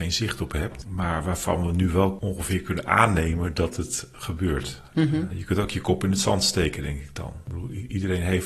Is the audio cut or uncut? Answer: uncut